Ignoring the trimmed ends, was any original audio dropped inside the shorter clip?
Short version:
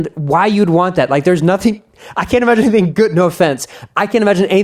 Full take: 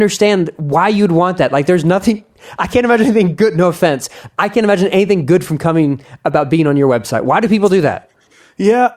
no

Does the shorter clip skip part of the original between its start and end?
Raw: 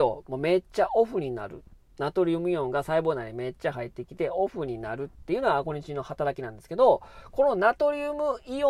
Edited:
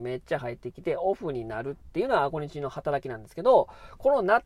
no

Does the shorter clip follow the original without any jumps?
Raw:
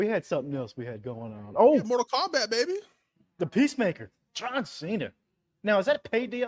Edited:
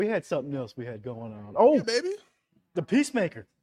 no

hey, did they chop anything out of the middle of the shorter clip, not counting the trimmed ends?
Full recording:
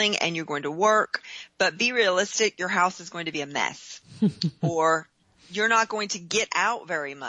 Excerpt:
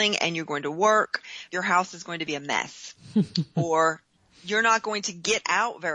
yes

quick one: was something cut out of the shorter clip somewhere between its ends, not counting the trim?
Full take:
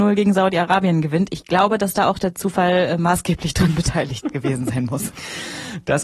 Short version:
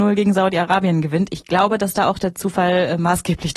no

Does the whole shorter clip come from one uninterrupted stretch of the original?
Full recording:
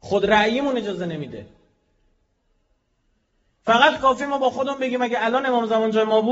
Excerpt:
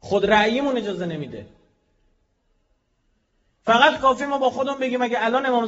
yes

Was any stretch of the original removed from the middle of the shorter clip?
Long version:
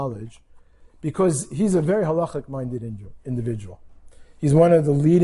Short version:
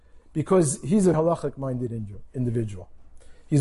yes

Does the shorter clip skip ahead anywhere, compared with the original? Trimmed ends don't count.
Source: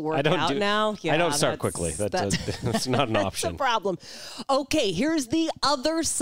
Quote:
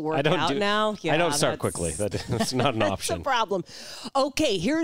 yes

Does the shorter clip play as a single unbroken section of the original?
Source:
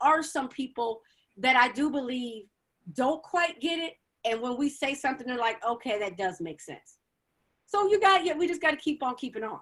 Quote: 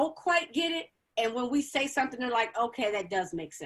yes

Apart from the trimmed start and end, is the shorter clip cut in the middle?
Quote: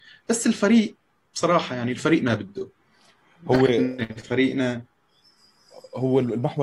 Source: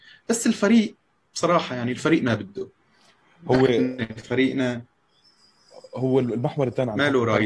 no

